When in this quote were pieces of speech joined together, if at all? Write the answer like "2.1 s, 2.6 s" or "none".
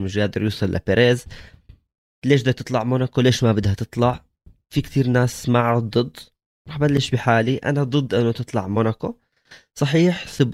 none